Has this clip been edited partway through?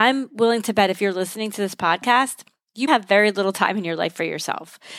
yes; 1 cut; at 2.9 s

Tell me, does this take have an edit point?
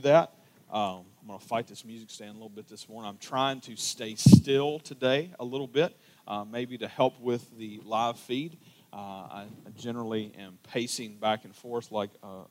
no; 0 cuts

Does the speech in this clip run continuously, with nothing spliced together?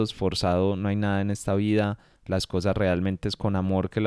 yes; 0 cuts

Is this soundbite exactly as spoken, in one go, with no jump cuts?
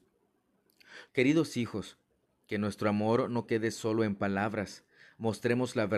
no; 1 cut; at 1.1 s

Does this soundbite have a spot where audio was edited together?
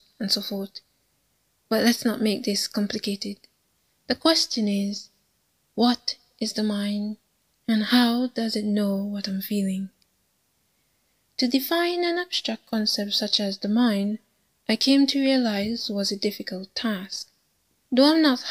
no; 0 cuts

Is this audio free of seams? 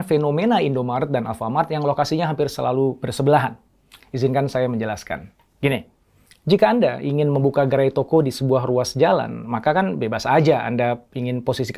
yes; 0 cuts

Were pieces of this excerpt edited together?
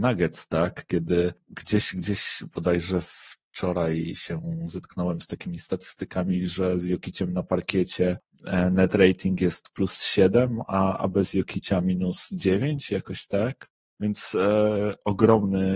no; 0 cuts

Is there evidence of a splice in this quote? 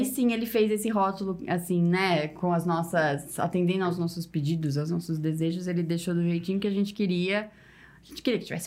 no; 0 cuts

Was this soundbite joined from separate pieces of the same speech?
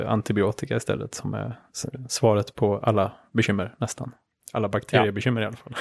no; 0 cuts

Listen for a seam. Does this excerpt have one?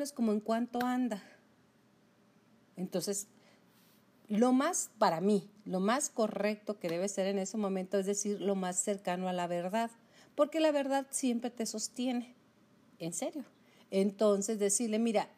no; 0 cuts

